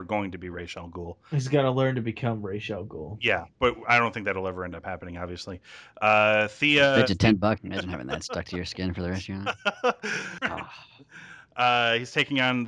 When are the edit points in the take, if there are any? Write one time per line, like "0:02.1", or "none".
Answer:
0:07.6
0:10.4